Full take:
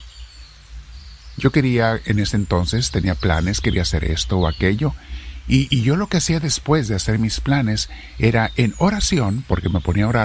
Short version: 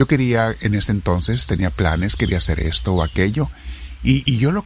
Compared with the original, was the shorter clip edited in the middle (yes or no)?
no